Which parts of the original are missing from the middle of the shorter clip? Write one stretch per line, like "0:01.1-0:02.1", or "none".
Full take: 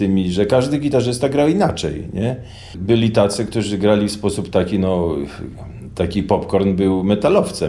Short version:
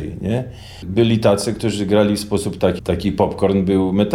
0:04.7-0:05.9